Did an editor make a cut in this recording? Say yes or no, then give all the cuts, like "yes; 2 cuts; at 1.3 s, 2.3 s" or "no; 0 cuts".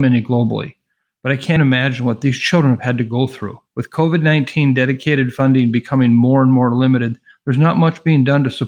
yes; 2 cuts; at 1.6 s, 3.7 s